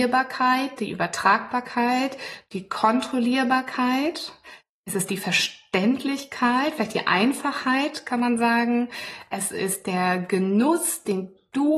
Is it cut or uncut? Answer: uncut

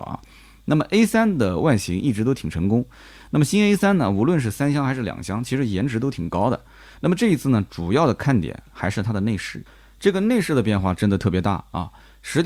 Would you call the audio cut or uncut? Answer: uncut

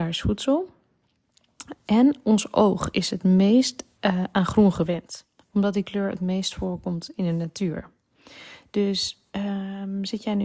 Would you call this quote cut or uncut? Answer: cut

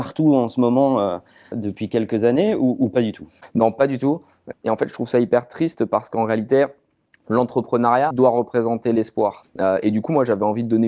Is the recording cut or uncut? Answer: cut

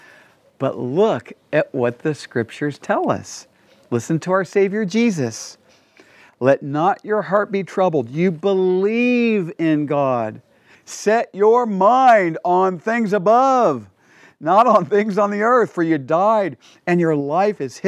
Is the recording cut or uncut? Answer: cut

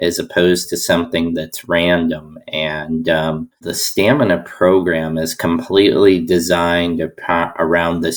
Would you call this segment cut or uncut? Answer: uncut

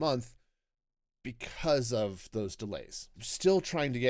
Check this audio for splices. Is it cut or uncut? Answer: cut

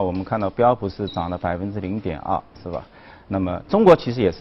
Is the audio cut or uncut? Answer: uncut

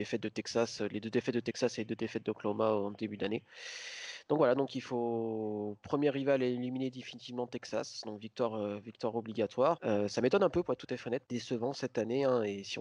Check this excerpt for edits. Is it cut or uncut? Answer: cut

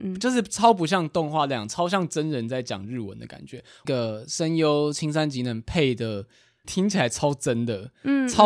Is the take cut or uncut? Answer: cut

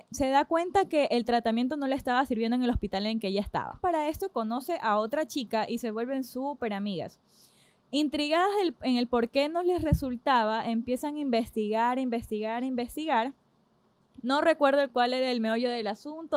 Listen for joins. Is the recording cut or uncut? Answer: cut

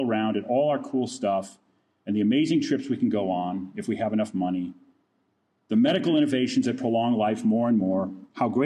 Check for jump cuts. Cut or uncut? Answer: uncut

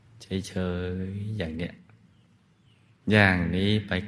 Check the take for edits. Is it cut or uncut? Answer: uncut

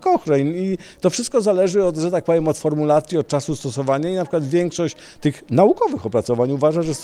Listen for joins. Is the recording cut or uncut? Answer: uncut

